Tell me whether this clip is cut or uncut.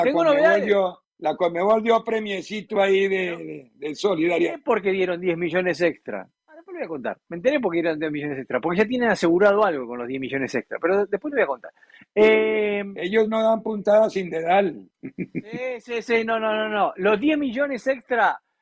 uncut